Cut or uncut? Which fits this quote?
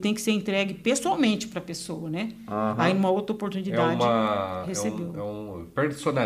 uncut